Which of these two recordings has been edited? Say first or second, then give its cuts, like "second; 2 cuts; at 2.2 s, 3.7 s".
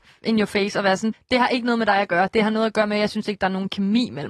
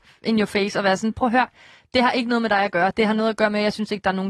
first; 1 cut; at 1.1 s